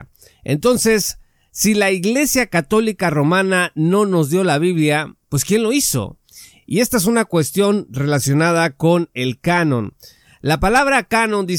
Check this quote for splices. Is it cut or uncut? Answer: uncut